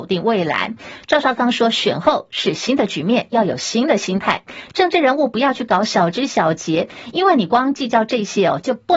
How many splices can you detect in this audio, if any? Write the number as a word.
zero